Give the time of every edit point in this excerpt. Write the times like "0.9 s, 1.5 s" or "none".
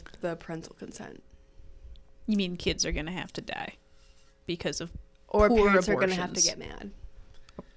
none